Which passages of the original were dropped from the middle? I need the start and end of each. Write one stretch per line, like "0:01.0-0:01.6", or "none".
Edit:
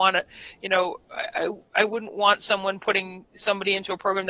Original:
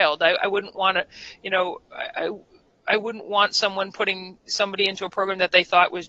0:02.5-0:02.8